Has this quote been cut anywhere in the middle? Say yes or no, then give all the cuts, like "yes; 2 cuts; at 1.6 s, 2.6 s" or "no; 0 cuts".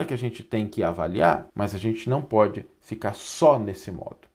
yes; 1 cut; at 1.5 s